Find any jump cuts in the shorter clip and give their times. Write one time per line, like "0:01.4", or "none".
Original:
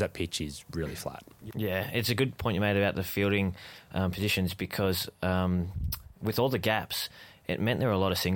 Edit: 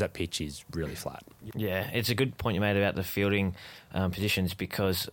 none